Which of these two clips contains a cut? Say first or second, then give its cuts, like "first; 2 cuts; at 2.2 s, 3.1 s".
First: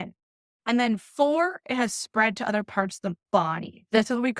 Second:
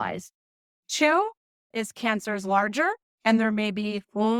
second; 1 cut; at 1.7 s